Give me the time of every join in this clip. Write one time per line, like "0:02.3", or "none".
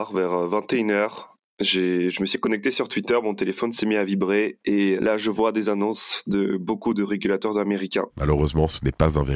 0:05.0
0:08.1